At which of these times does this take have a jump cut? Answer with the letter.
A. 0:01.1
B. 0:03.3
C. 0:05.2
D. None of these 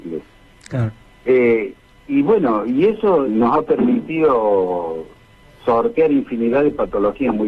B